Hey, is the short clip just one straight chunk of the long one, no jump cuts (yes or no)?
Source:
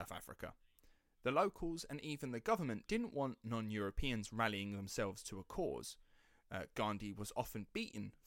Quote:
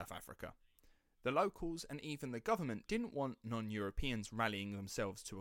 yes